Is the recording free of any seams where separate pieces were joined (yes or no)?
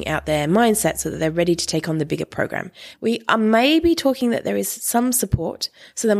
no